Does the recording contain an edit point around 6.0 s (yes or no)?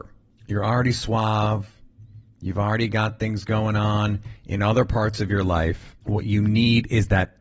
yes